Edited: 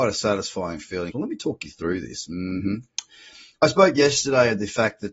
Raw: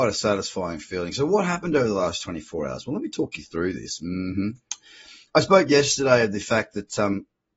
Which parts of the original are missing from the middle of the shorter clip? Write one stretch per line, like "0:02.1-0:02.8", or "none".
0:01.1-0:02.8